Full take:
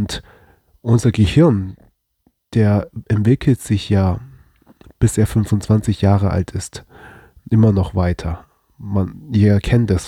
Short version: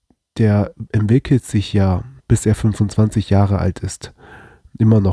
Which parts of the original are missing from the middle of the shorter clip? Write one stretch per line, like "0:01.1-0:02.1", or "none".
0:04.3-0:04.9